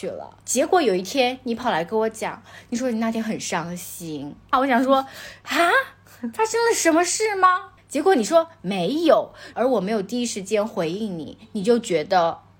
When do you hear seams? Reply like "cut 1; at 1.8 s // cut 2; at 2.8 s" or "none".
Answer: cut 1; at 4.5 s // cut 2; at 7.8 s // cut 3; at 9.5 s